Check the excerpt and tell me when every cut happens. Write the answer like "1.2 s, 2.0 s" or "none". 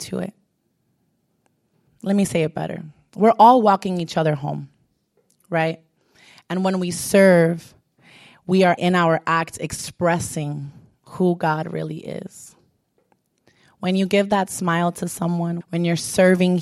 1.9 s, 8.8 s, 15.6 s